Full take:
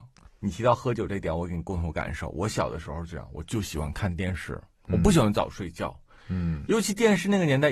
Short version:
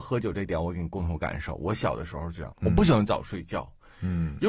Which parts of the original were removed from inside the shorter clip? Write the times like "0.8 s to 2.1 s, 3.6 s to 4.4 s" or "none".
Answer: 3.3 s to 4.8 s